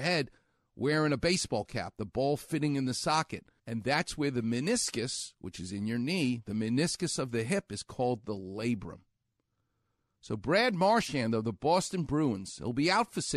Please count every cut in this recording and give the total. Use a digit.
1